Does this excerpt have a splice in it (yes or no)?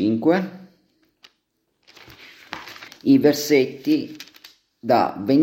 yes